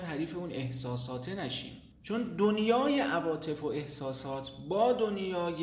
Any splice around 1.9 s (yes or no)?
yes